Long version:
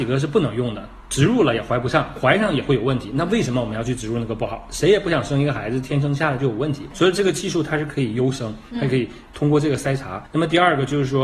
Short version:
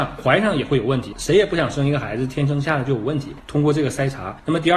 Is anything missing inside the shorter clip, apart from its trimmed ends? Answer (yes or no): yes